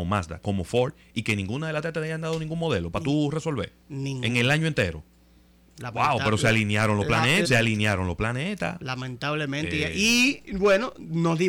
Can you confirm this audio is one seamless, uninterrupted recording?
no; 1 cut; at 7.4 s

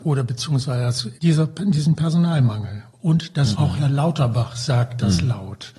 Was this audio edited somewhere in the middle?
yes; 2 cuts; at 1.1 s, 3.5 s

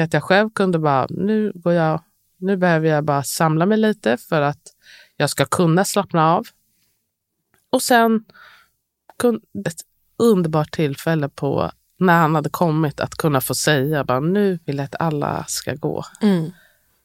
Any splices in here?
yes; 2 cuts; at 9.6 s, 14.6 s

